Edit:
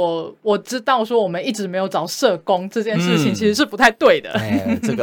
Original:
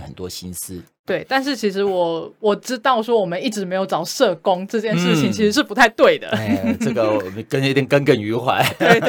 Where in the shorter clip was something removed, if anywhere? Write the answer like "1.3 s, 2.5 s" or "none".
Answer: none